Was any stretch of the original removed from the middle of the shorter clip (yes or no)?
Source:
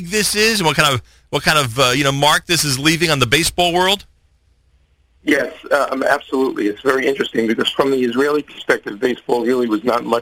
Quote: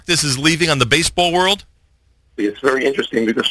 yes